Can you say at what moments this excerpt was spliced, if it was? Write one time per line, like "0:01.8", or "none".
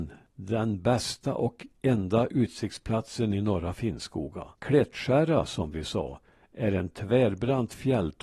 0:04.5